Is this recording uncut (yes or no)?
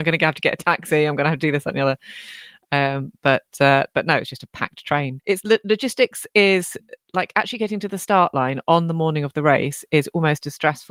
no